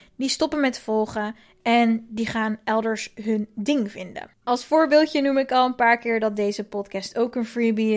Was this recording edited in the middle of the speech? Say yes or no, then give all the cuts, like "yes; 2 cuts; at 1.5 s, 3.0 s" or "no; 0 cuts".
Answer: yes; 1 cut; at 4.3 s